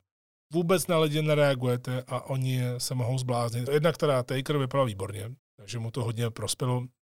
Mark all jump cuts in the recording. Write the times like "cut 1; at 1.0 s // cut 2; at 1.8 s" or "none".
cut 1; at 3.7 s // cut 2; at 5.4 s